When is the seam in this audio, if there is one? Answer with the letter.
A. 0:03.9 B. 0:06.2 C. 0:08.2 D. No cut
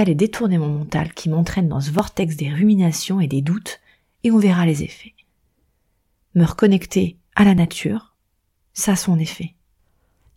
D